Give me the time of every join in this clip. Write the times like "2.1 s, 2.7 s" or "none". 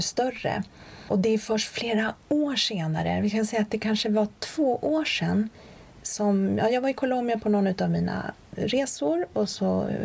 none